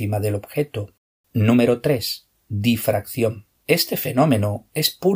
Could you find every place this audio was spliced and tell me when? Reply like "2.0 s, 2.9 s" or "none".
1.2 s, 3.6 s